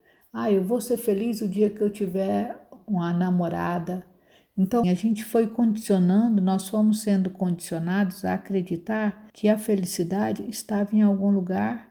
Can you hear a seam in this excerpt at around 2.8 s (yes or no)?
yes